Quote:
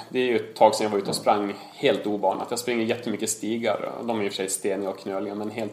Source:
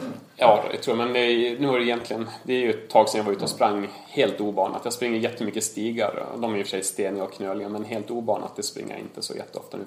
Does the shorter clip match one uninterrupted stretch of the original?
yes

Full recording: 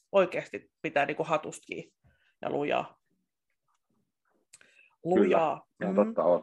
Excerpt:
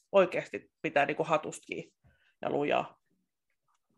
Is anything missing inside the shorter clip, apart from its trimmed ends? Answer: no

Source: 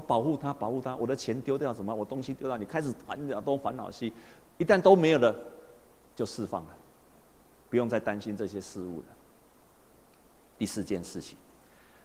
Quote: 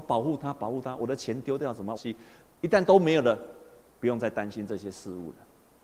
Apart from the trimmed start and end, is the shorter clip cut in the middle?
yes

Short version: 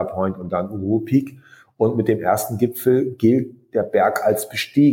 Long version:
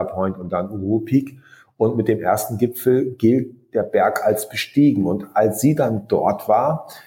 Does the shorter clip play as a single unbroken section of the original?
yes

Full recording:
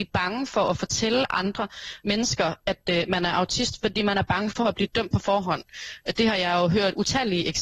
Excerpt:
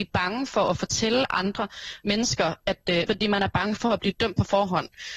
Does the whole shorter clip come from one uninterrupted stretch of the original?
no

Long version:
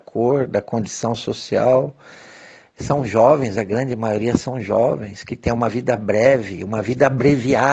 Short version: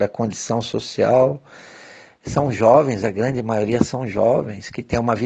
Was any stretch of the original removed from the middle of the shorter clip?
no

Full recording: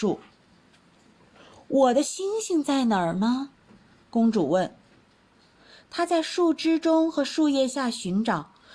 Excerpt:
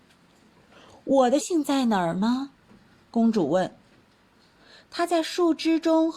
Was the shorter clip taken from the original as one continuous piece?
no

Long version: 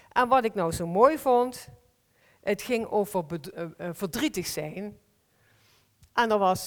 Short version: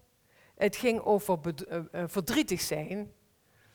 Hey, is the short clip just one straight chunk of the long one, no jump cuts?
yes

